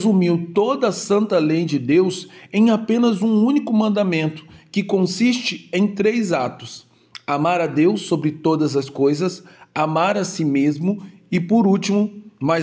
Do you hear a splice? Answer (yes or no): no